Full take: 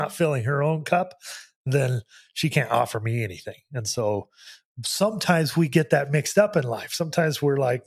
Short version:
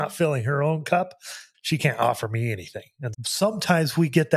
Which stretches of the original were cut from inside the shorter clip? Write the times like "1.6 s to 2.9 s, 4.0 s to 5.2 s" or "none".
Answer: 1.5 s to 2.3 s, 3.8 s to 4.7 s